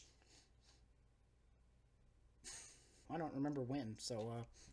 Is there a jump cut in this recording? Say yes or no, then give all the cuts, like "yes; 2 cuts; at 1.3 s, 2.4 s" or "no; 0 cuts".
yes; 1 cut; at 3.1 s